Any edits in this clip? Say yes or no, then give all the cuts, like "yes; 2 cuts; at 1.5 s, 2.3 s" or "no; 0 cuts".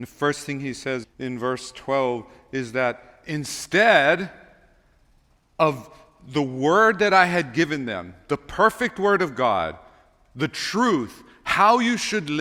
yes; 1 cut; at 1.0 s